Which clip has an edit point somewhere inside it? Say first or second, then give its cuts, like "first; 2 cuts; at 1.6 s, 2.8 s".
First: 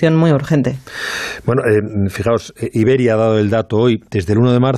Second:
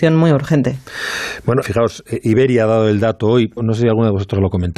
second; 2 cuts; at 1.6 s, 3.6 s